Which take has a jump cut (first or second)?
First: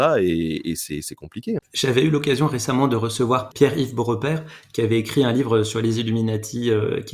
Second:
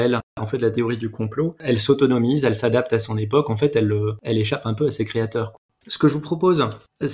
first